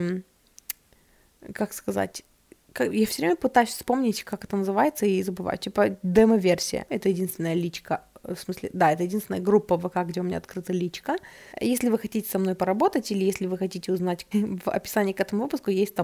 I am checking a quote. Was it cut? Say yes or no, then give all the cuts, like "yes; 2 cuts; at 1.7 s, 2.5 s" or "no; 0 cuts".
yes; 3 cuts; at 6.9 s, 11.5 s, 14.3 s